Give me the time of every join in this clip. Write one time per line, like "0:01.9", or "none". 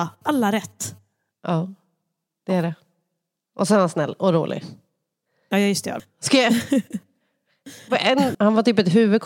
0:06.0
0:08.3